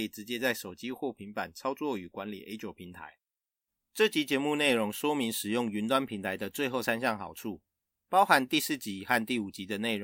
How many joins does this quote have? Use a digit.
0